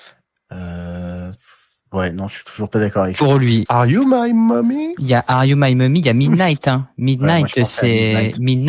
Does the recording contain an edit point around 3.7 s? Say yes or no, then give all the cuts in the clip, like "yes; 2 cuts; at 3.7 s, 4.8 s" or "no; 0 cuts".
yes; 1 cut; at 3.7 s